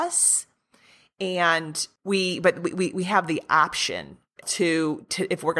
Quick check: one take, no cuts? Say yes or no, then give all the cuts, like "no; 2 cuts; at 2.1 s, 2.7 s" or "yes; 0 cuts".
no; 1 cut; at 4.4 s